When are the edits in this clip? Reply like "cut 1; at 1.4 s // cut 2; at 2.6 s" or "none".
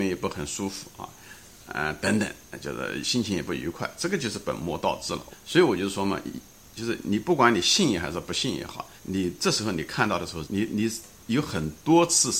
cut 1; at 5.3 s // cut 2; at 9.0 s // cut 3; at 10.4 s

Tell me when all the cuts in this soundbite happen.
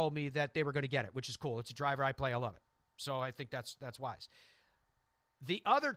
none

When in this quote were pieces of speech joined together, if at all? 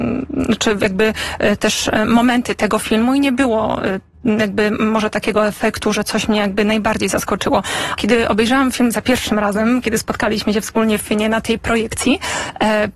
cut 1; at 8.0 s

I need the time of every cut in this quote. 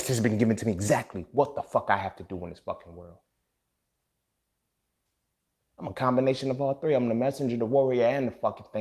cut 1; at 5.6 s

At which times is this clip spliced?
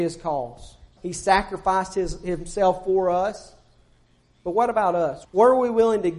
cut 1; at 1.0 s // cut 2; at 5.2 s

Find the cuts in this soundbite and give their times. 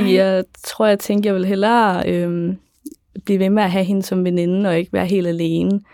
none

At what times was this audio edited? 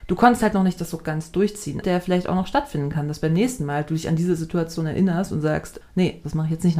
cut 1; at 1.8 s // cut 2; at 5.8 s

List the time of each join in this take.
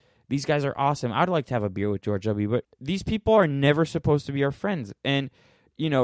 cut 1; at 2.6 s

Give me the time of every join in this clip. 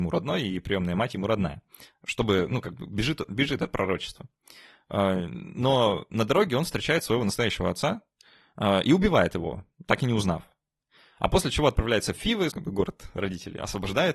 cut 1; at 12.5 s

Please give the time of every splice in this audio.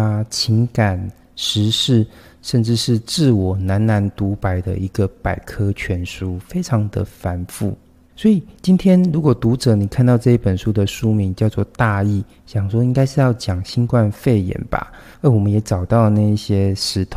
cut 1; at 15.1 s

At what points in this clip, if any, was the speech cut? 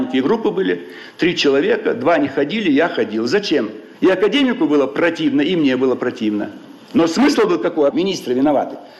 cut 1; at 3.9 s // cut 2; at 7.9 s

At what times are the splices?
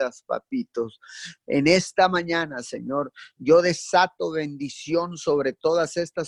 none

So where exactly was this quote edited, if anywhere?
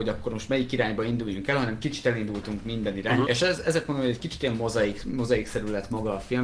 cut 1; at 3.2 s

